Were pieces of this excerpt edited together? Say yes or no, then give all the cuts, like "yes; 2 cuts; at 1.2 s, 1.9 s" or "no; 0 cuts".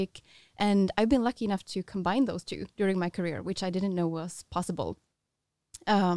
no; 0 cuts